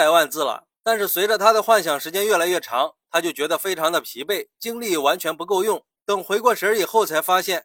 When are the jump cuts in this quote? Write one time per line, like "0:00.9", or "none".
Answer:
0:05.9